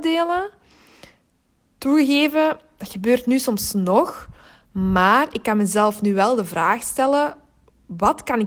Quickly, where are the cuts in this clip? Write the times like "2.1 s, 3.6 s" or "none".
none